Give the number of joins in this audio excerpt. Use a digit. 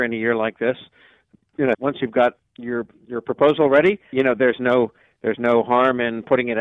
2